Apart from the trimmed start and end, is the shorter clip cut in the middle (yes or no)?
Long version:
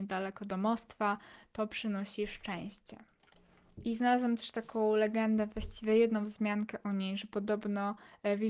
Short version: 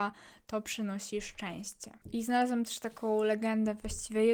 yes